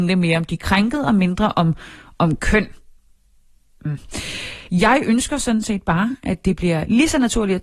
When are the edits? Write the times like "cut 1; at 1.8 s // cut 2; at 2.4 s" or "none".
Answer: cut 1; at 4.7 s